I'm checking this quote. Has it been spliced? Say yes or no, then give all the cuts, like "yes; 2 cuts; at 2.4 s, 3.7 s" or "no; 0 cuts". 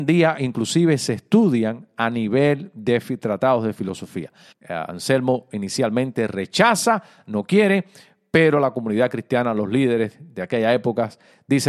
yes; 1 cut; at 4.5 s